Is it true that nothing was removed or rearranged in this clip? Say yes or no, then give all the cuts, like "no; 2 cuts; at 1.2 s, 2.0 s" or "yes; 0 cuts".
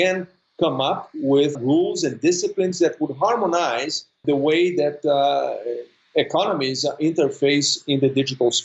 no; 2 cuts; at 1.5 s, 4.2 s